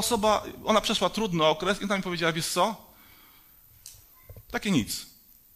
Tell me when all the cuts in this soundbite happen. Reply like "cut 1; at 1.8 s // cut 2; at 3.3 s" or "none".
cut 1; at 4.4 s